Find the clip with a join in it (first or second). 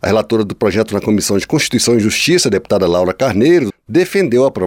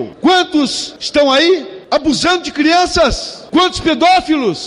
first